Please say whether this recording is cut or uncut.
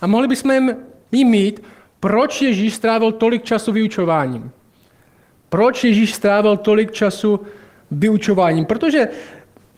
cut